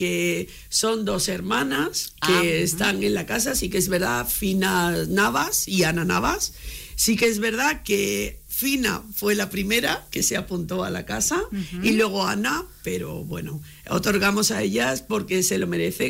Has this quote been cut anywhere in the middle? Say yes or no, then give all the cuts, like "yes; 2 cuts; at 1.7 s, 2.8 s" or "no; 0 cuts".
no; 0 cuts